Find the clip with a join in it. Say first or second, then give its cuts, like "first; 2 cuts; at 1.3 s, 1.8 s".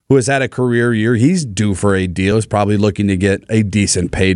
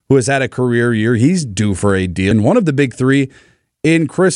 second; 1 cut; at 2.3 s